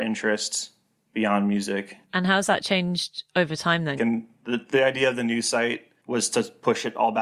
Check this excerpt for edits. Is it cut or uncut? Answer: cut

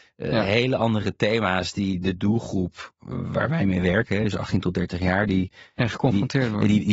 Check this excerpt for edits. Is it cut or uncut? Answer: uncut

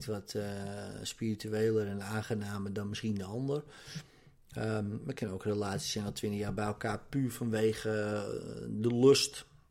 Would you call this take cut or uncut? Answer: uncut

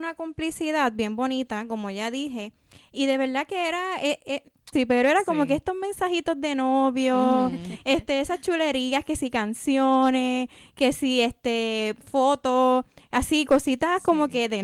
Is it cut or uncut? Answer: cut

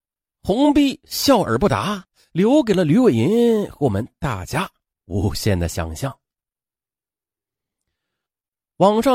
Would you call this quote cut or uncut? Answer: uncut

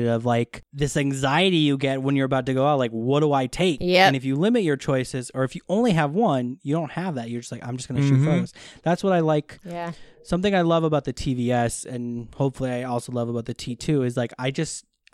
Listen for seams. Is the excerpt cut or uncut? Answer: uncut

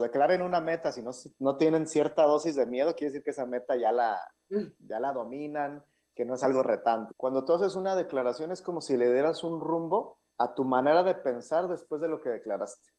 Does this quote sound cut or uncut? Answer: cut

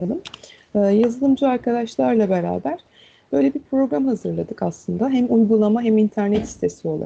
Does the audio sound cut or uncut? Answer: uncut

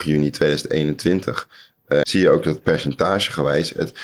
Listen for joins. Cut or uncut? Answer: cut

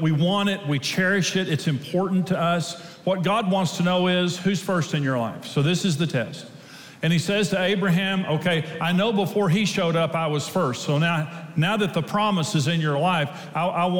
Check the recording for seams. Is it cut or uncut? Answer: uncut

